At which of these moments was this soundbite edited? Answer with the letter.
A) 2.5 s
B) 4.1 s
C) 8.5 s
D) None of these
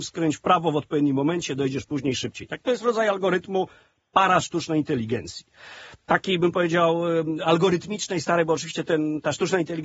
D